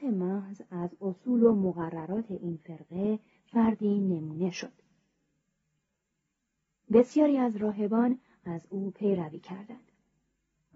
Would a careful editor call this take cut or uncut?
uncut